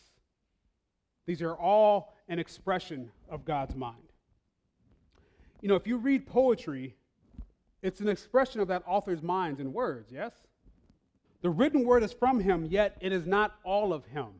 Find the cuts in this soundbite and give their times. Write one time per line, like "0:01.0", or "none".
0:11.3